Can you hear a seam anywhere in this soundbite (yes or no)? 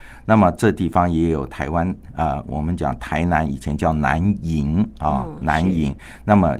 no